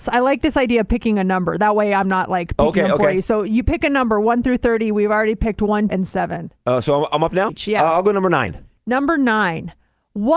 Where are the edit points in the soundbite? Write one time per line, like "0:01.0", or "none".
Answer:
0:05.9
0:07.5